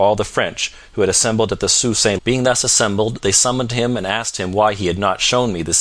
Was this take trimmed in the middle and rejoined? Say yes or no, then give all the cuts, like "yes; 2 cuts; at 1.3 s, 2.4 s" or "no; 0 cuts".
yes; 1 cut; at 2.2 s